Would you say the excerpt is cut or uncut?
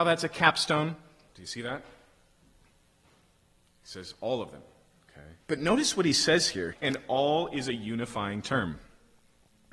cut